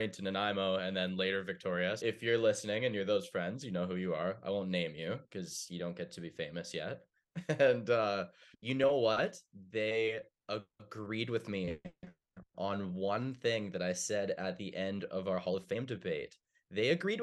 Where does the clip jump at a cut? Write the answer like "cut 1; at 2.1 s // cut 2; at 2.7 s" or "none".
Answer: cut 1; at 2.0 s // cut 2; at 8.5 s